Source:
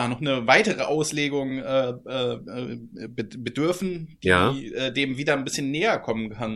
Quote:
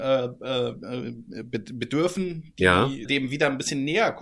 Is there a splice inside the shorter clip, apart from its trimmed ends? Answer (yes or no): yes